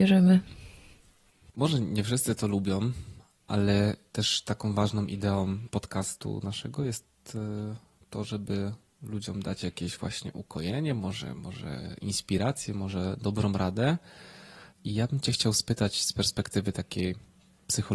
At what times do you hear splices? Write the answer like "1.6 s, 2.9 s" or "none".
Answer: none